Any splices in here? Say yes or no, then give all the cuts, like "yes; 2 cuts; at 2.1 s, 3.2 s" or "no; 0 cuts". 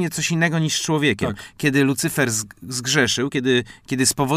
no; 0 cuts